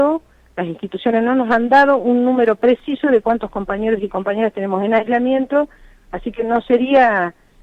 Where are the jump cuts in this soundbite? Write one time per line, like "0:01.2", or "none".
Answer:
none